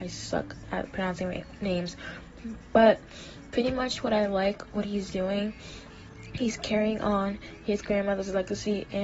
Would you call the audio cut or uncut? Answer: cut